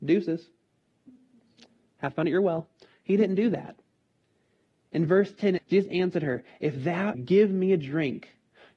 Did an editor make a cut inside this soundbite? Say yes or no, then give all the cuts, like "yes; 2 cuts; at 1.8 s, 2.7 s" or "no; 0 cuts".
yes; 2 cuts; at 5.6 s, 7.1 s